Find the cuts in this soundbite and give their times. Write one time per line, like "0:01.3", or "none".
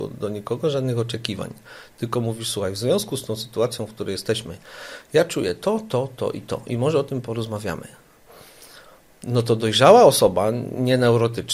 none